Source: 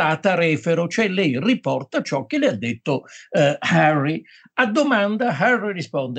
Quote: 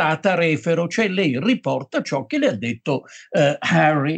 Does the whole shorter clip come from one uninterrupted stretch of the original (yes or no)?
yes